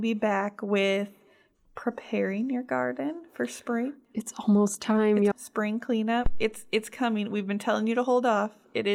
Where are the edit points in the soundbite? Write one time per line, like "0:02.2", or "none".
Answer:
0:05.3